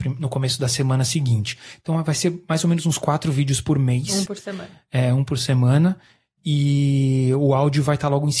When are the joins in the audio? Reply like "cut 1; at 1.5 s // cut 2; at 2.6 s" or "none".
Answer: none